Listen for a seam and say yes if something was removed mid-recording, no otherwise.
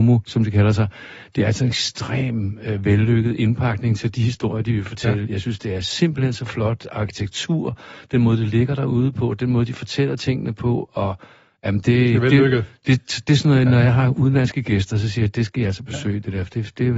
no